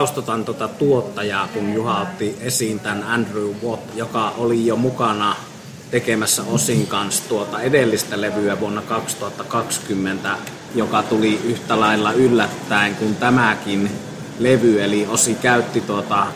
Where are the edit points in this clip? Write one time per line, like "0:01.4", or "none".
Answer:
0:03.9
0:10.7